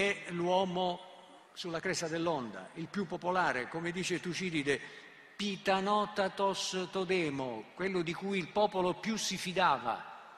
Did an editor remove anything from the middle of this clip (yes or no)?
yes